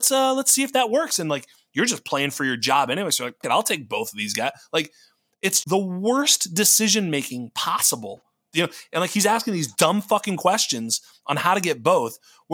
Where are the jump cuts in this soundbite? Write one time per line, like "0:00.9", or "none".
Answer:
0:03.4
0:05.6
0:08.5